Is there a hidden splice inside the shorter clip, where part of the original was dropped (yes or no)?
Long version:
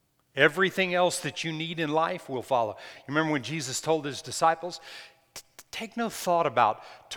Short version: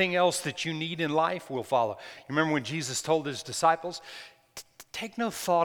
no